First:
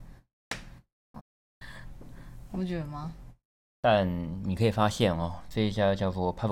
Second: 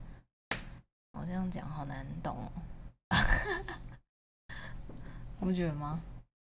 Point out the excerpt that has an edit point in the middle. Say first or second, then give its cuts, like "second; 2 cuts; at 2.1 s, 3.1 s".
first; 2 cuts; at 1.2 s, 3.6 s